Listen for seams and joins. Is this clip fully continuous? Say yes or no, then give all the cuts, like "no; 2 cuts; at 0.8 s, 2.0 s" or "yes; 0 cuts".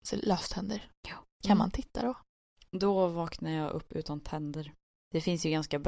no; 1 cut; at 1.3 s